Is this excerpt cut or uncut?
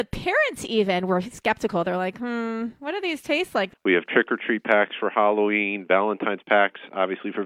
cut